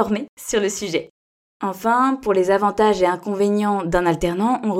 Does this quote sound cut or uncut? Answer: uncut